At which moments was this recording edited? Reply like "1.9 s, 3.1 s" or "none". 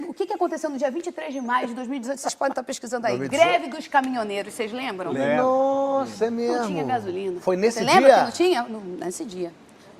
none